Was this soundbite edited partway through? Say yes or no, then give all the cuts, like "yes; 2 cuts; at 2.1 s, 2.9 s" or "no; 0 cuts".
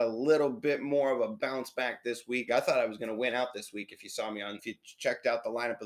yes; 2 cuts; at 2.5 s, 4.6 s